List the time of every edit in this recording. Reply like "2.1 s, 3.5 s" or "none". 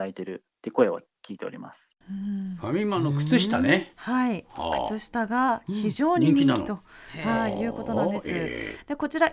2.0 s